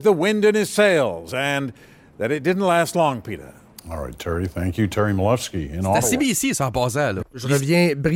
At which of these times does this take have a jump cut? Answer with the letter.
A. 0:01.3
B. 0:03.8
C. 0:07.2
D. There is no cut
C